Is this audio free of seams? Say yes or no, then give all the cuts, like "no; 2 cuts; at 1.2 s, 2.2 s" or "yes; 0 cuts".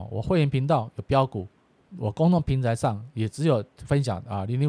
yes; 0 cuts